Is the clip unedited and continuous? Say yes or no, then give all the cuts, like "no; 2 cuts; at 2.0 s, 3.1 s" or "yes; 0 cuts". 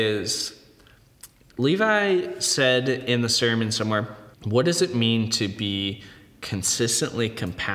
no; 1 cut; at 4.3 s